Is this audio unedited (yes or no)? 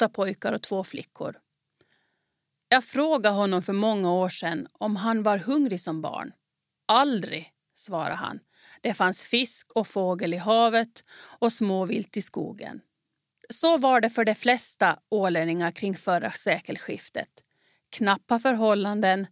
yes